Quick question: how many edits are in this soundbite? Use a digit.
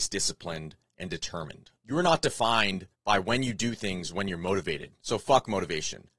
1